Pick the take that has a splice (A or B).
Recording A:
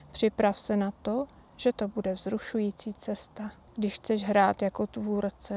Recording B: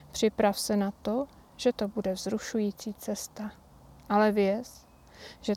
A